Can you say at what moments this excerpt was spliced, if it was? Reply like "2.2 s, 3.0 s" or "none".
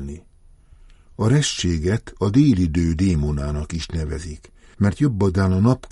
1.1 s